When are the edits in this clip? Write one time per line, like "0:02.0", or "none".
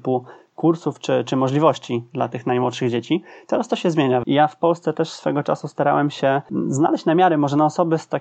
0:04.2